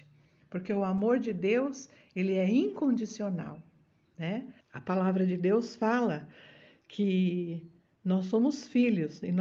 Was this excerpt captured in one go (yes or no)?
no